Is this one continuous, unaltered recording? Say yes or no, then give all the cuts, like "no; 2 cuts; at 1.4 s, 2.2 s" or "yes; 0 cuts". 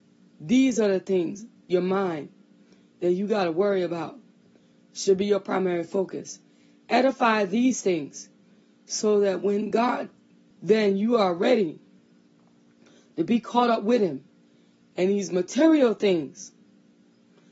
no; 1 cut; at 10.5 s